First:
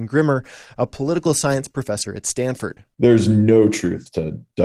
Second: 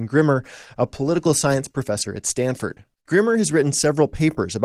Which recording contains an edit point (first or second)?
second